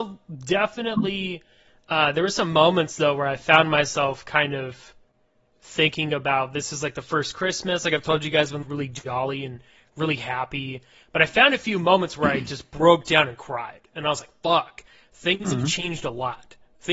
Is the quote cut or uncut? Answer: cut